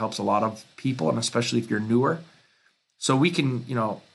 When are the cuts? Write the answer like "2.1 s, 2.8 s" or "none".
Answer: none

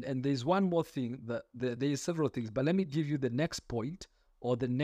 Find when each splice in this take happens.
none

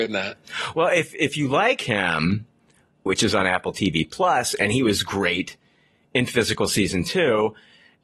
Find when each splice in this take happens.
3.1 s

